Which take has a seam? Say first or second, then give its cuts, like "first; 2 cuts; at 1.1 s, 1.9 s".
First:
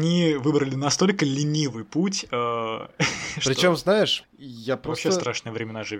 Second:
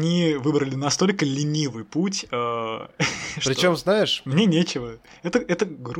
first; 1 cut; at 4.2 s